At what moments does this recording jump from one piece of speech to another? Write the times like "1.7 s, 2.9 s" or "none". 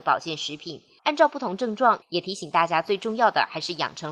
1.0 s, 2.0 s

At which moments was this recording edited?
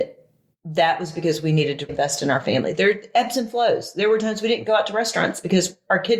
1.9 s

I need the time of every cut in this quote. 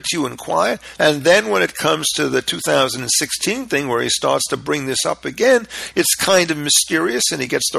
1.0 s

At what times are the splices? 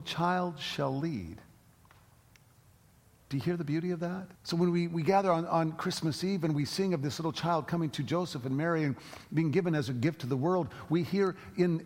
4.3 s

